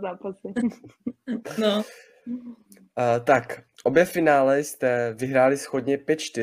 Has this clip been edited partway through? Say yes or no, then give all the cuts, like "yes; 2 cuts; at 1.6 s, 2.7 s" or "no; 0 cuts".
no; 0 cuts